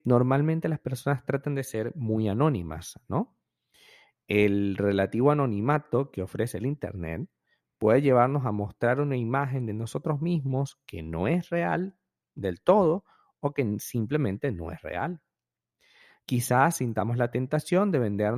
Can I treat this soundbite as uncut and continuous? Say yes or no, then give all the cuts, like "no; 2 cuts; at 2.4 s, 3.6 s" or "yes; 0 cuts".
yes; 0 cuts